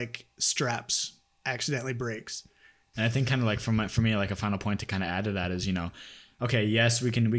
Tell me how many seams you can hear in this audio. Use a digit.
1